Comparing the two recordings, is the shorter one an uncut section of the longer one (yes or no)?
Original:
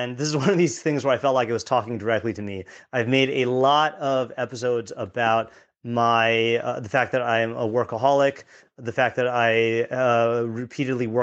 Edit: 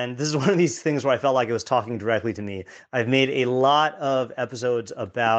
yes